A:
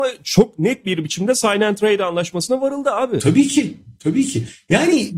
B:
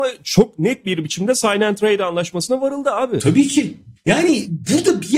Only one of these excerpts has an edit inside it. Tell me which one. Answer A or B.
B